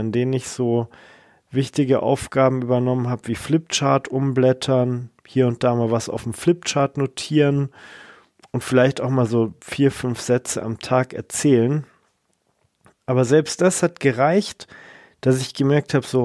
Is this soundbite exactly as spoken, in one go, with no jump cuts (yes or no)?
yes